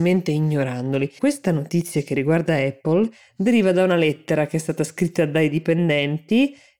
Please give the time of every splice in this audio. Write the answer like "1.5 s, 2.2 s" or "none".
1.2 s